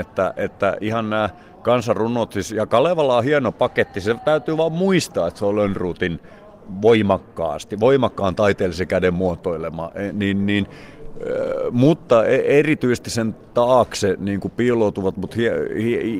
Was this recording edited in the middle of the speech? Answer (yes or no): no